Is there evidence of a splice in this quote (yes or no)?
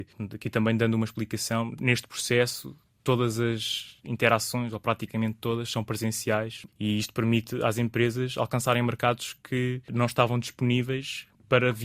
yes